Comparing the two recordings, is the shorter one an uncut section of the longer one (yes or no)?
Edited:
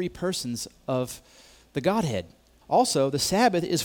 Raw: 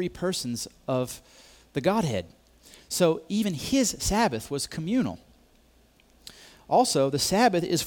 no